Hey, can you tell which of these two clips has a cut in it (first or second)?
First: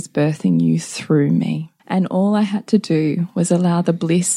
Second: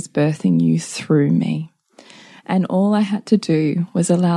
first